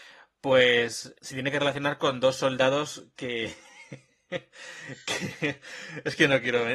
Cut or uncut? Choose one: cut